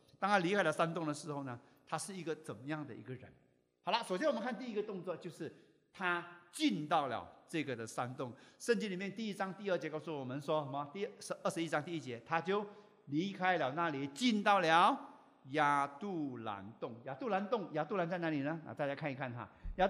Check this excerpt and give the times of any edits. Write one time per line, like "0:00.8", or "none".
none